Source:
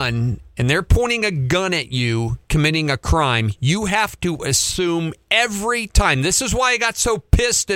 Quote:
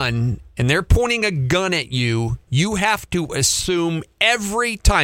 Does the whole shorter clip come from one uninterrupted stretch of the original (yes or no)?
no